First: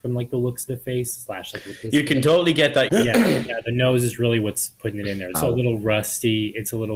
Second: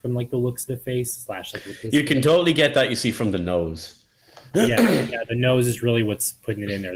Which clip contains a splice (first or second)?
first